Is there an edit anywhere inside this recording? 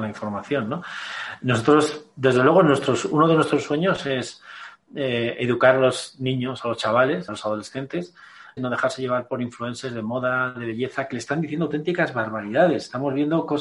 yes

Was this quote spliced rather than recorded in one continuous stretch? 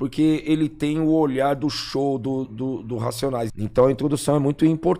yes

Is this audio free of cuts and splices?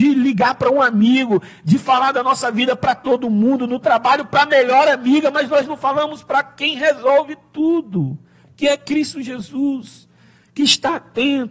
yes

